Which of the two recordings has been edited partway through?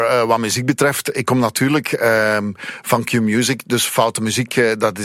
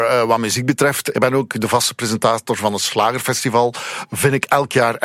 second; 1 cut; at 1.1 s

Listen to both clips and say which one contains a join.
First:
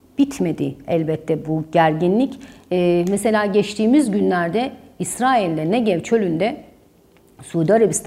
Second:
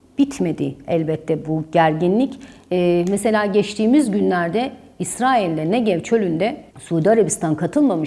second; 1 cut; at 6.7 s

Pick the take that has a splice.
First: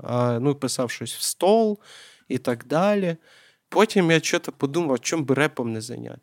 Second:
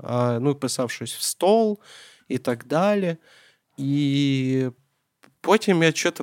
first; 1 cut; at 3.7 s

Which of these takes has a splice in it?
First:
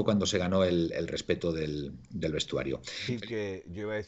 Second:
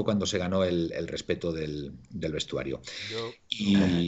first; 1 cut; at 3.1 s

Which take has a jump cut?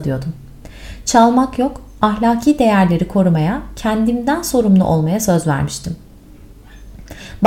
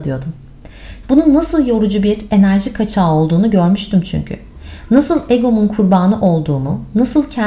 second; 1 cut; at 1.0 s

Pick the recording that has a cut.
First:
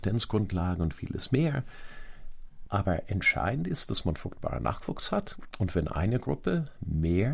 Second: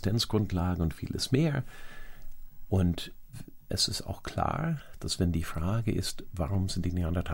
second; 1 cut; at 2.7 s

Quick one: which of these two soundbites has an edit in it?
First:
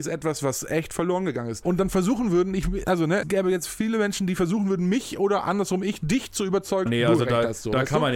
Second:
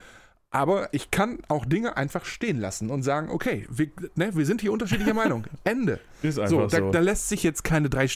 first; 3 cuts; at 1.6 s, 3.2 s, 6.9 s

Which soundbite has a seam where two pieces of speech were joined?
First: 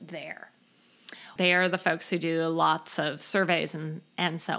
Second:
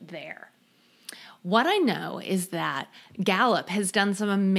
first; 1 cut; at 1.4 s

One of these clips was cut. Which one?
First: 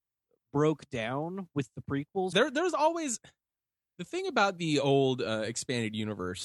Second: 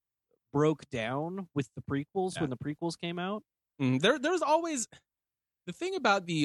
first; 1 cut; at 2.3 s

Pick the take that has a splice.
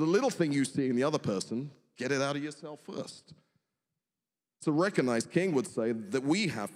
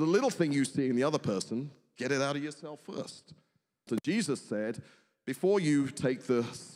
second; 1 cut; at 3.9 s

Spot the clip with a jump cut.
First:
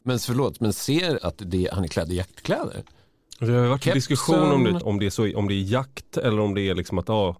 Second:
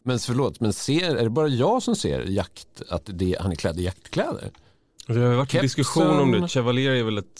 first; 2 cuts; at 1.2 s, 4.8 s

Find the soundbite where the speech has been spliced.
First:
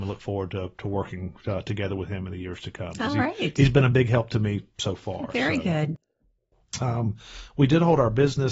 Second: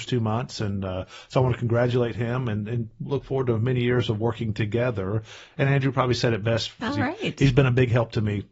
second; 1 cut; at 6.8 s

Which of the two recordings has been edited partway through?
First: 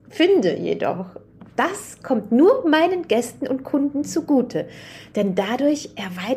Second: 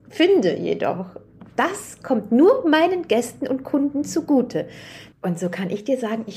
second; 1 cut; at 5.1 s

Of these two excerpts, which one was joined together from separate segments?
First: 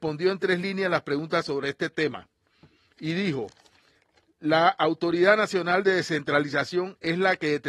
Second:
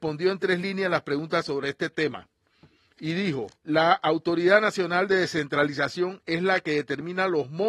second; 1 cut; at 3.6 s

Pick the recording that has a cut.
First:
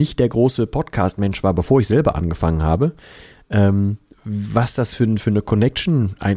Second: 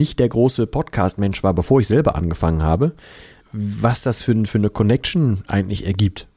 second; 1 cut; at 3.4 s

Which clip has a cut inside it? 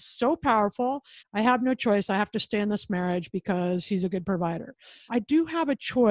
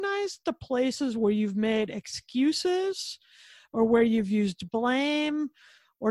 first; 2 cuts; at 1.2 s, 5.1 s

